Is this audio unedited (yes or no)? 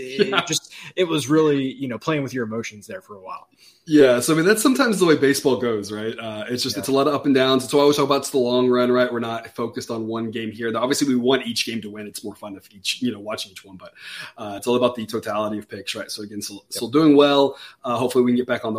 yes